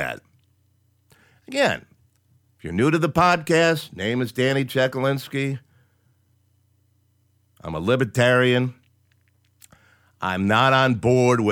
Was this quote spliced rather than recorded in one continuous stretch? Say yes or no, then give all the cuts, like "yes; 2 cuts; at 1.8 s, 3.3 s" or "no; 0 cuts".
no; 0 cuts